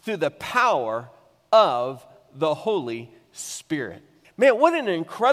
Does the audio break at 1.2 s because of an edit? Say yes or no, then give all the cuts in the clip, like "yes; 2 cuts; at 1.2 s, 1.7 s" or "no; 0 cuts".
no; 1 cut; at 4.2 s